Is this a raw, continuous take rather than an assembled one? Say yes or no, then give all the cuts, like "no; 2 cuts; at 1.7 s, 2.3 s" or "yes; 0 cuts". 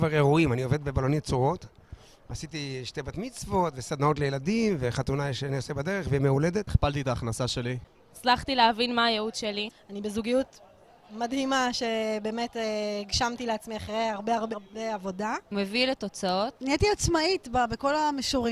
no; 2 cuts; at 14.5 s, 16.5 s